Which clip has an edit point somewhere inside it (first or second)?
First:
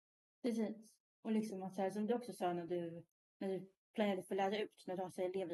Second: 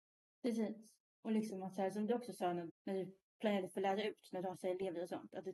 second